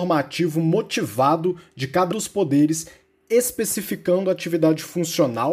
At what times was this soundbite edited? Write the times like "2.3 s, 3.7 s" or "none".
2.1 s